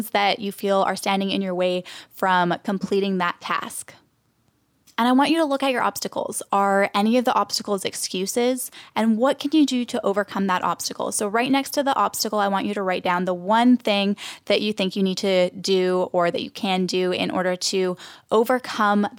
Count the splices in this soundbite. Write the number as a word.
one